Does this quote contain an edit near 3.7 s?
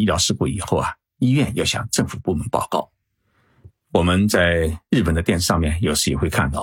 yes; 1 cut; at 3.7 s

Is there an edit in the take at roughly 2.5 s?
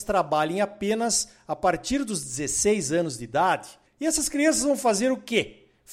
no; 1 cut; at 3.9 s

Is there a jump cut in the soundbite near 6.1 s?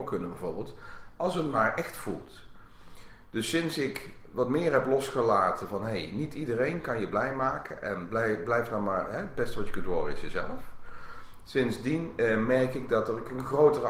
no; 0 cuts

